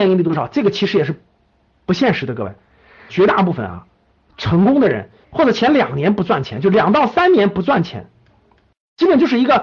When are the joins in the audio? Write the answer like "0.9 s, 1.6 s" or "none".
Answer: 3.1 s, 5.2 s